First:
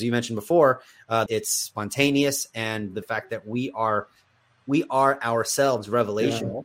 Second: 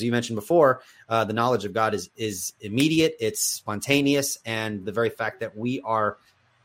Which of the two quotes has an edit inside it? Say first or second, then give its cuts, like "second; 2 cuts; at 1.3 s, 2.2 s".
first; 2 cuts; at 1.3 s, 3.0 s